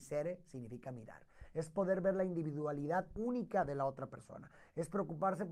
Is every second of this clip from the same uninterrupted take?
yes; 0 cuts

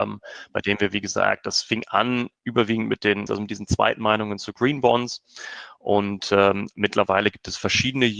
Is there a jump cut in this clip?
yes; 1 cut; at 3.3 s

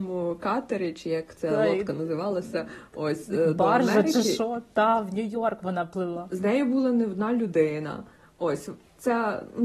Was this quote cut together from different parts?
no; 0 cuts

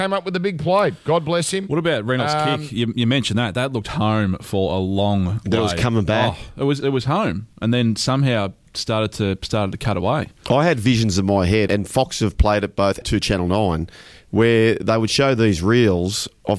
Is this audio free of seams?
no; 3 cuts; at 6.8 s, 11.7 s, 13.0 s

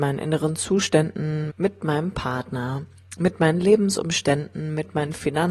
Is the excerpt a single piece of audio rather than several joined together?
no; 1 cut; at 1.5 s

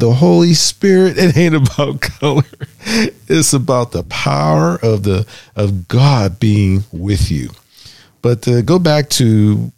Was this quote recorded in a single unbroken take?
yes; 0 cuts

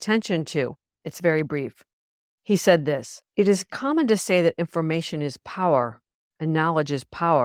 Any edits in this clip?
yes; 2 cuts; at 1.0 s, 3.3 s

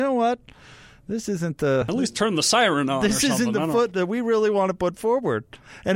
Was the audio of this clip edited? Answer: no; 0 cuts

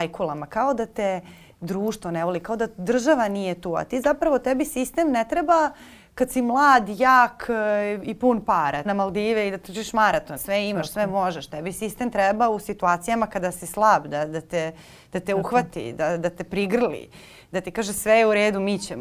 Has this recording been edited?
yes; 2 cuts; at 8.9 s, 10.4 s

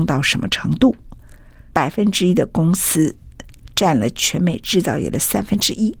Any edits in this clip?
no; 0 cuts

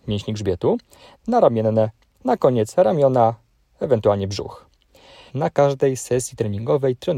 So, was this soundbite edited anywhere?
yes; 2 cuts; at 1.1 s, 5.3 s

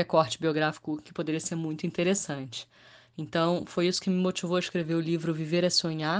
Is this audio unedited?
yes; 0 cuts

